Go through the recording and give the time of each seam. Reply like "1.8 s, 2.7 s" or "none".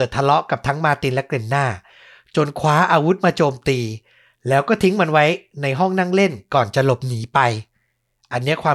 none